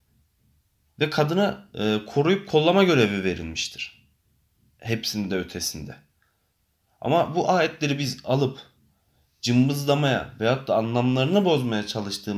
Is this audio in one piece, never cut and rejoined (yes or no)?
yes